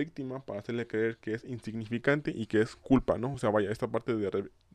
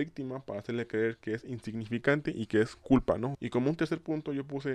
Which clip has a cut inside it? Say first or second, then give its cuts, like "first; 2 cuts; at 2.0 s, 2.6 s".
second; 1 cut; at 3.3 s